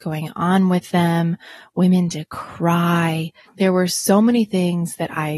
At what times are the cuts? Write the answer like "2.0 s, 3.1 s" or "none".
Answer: 3.4 s